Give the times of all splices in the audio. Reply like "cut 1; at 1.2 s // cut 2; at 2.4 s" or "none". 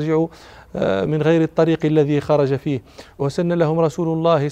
cut 1; at 1.1 s

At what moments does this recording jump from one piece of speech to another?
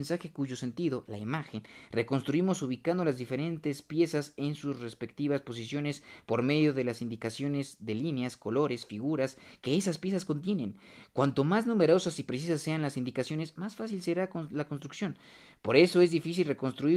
none

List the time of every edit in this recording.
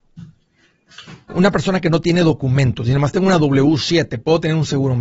cut 1; at 1.3 s

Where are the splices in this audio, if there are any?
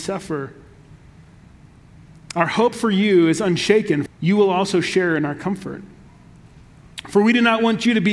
cut 1; at 4.1 s

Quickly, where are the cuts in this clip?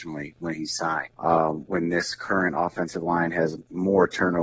cut 1; at 1.1 s

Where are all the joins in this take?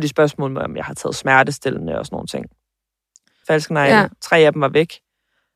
cut 1; at 3.4 s

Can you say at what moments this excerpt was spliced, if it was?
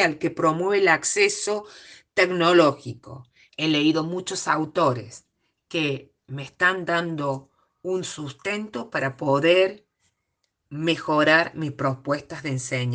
cut 1; at 3.5 s

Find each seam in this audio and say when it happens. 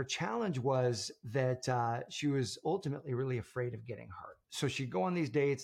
none

